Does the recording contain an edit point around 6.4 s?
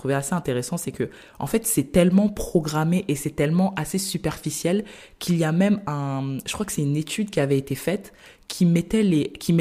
no; 0 cuts

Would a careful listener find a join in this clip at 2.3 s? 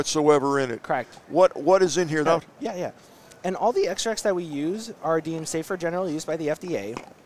yes; 1 cut; at 2.3 s

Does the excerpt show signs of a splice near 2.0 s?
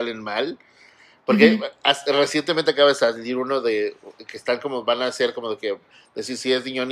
no; 0 cuts

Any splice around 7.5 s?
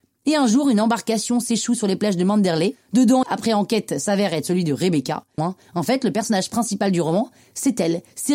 no; 2 cuts; at 3.2 s, 5.4 s

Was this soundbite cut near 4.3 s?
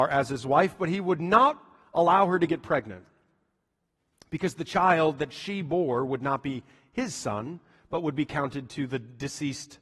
no; 0 cuts

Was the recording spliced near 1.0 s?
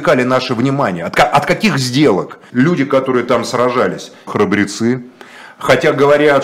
no; 2 cuts; at 2.5 s, 4.3 s

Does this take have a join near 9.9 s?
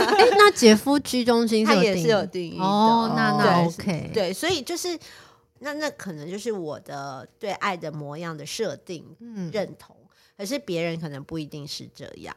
no; 1 cut; at 5.6 s

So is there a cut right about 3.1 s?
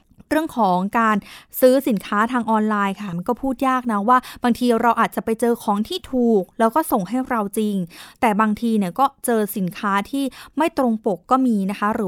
yes; 1 cut; at 3.1 s

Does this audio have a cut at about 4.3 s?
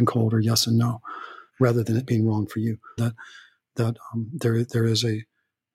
no; 2 cuts; at 1.5 s, 3.0 s

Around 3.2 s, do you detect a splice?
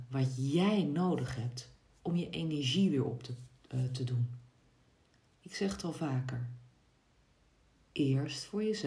no; 2 cuts; at 5.3 s, 7.7 s

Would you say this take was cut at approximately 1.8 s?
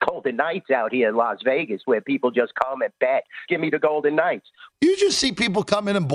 no; 2 cuts; at 3.5 s, 4.7 s

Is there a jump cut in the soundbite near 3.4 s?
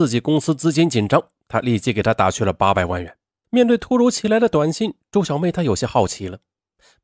yes; 1 cut; at 3.4 s

